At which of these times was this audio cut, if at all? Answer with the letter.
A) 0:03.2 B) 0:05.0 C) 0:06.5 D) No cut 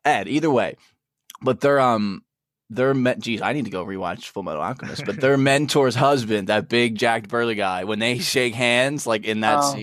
D